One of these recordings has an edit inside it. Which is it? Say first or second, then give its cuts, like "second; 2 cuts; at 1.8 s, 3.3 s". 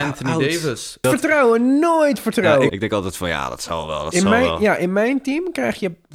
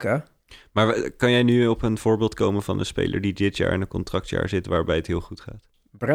first; 2 cuts; at 1.0 s, 2.7 s